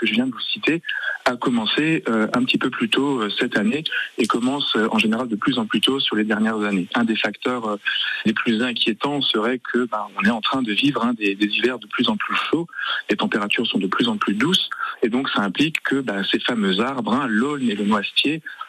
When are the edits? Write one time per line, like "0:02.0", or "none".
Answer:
none